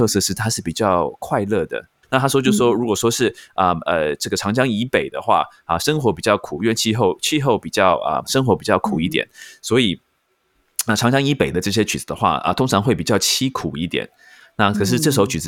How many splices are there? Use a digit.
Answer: 2